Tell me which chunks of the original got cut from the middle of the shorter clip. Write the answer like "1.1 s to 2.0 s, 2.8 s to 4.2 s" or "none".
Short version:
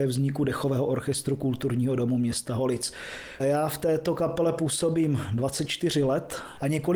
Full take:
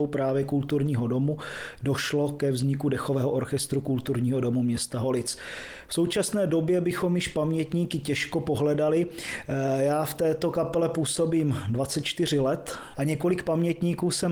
5.8 s to 9.8 s